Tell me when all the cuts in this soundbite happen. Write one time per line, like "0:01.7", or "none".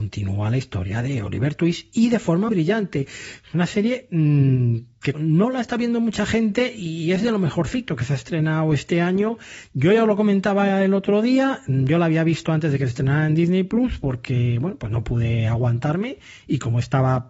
0:02.5
0:05.1